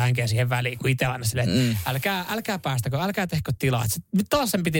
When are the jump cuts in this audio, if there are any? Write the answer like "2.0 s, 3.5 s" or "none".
none